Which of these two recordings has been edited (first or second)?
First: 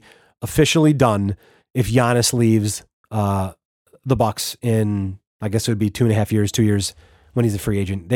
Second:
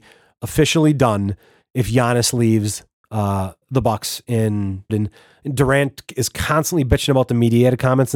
second